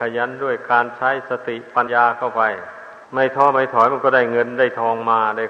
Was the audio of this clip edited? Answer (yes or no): yes